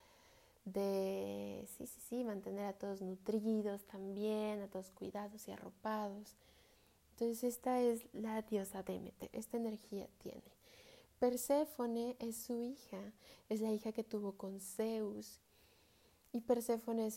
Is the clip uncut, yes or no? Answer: yes